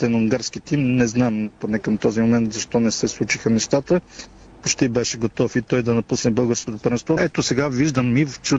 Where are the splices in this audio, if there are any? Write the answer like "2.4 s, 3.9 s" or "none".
7.2 s